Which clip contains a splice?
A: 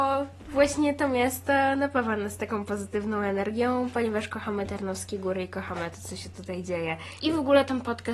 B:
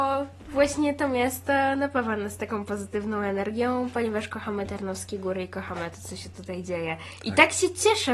A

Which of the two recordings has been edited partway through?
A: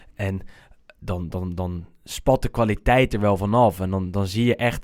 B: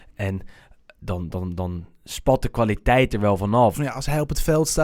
B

